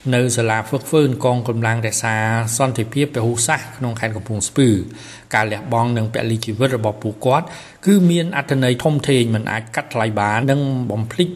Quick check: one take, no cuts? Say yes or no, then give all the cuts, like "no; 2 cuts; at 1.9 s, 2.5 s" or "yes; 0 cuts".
no; 1 cut; at 10.4 s